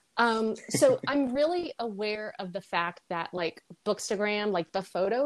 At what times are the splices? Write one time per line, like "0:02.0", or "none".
none